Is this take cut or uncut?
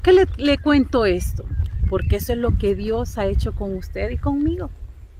uncut